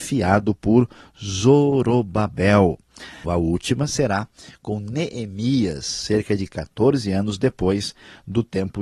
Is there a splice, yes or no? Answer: yes